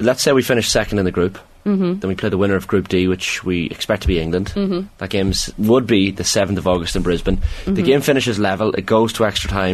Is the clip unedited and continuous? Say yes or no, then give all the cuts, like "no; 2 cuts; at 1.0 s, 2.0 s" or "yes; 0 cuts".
yes; 0 cuts